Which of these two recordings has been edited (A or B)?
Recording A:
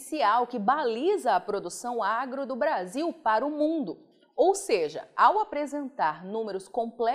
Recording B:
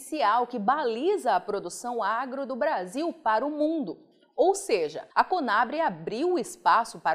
B